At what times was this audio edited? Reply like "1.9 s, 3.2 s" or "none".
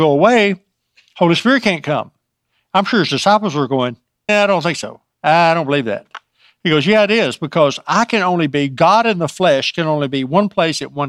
4.3 s

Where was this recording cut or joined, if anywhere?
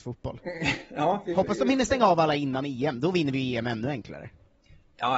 none

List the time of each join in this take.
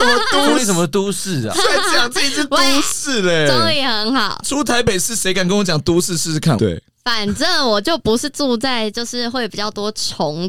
6.6 s

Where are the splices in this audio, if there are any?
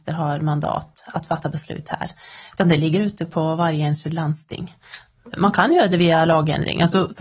5.3 s

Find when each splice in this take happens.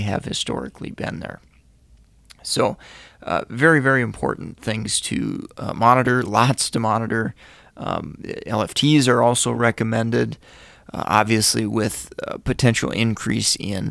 none

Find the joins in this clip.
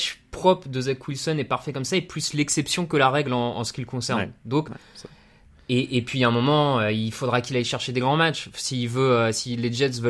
none

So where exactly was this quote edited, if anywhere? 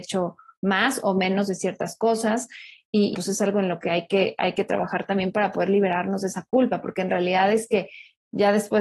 3.1 s

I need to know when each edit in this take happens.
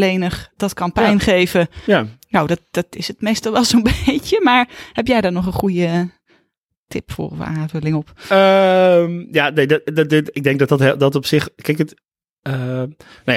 none

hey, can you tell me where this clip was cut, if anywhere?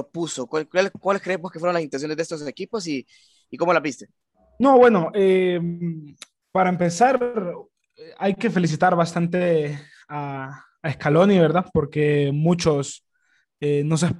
none

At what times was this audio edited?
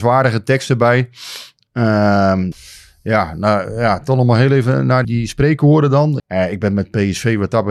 2.5 s, 5.0 s, 6.2 s

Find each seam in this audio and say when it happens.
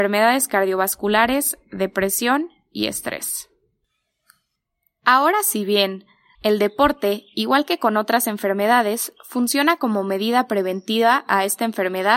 6.4 s

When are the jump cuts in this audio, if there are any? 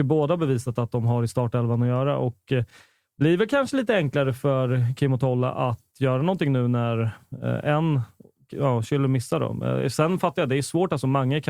none

